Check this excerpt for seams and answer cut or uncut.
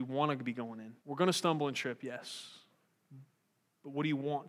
cut